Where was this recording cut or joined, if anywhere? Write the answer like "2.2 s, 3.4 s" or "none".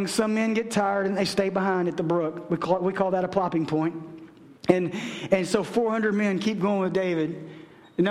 4.6 s